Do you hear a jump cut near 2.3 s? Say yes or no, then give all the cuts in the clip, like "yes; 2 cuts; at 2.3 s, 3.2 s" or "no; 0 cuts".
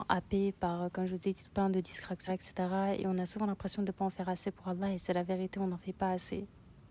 yes; 1 cut; at 2.3 s